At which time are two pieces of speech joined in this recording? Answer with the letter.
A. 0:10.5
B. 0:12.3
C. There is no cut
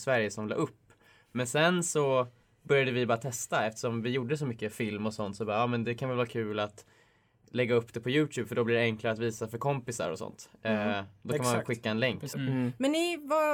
B